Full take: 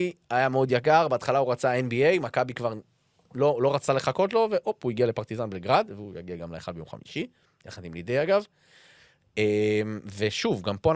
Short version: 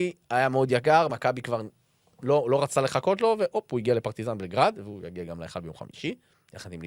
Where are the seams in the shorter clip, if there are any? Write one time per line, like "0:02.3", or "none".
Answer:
0:01.1